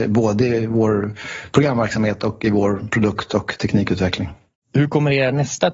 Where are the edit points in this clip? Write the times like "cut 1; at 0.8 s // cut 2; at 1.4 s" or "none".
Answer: none